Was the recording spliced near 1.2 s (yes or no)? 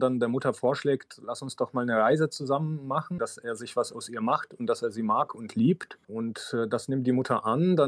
no